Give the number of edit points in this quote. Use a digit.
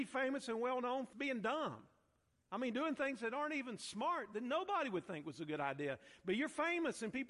1